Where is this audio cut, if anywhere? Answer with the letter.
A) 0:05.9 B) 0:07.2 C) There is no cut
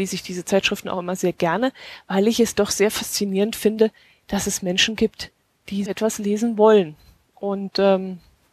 A